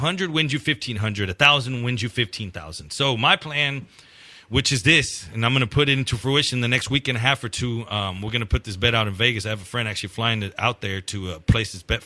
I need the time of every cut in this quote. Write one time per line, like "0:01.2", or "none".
none